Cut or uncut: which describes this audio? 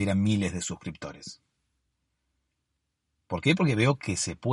uncut